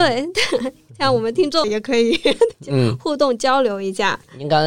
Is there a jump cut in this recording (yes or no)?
yes